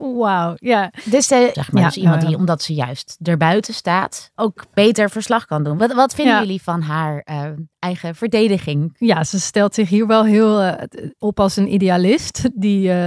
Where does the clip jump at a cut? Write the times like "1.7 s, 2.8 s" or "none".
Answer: 1.5 s